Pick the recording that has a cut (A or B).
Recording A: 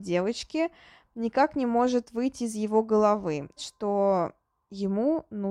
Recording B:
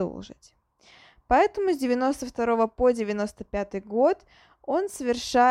A